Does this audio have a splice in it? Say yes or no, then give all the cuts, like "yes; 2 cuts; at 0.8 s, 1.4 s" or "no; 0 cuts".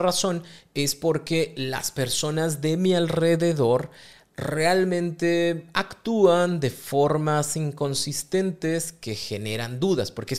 no; 0 cuts